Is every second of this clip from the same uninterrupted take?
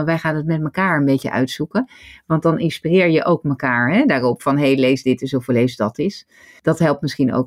yes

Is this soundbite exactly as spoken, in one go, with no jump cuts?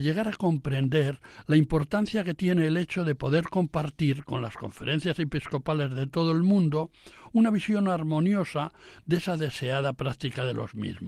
yes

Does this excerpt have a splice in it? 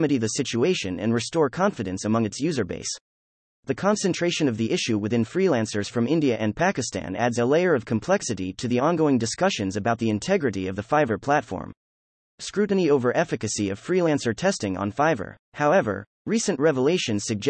yes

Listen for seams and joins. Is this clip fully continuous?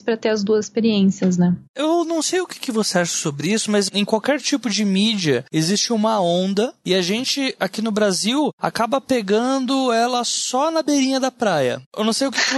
yes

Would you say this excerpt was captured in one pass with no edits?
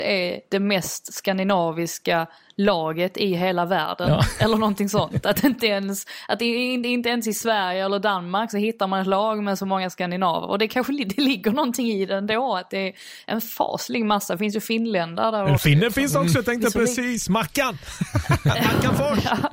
yes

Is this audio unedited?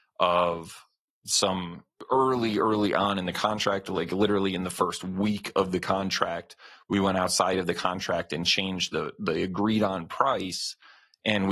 yes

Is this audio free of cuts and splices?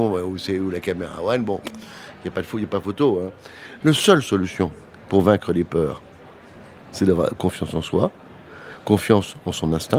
no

